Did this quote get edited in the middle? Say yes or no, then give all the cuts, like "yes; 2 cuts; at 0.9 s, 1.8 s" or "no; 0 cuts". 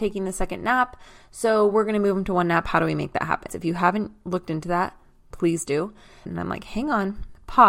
yes; 2 cuts; at 3.5 s, 6.2 s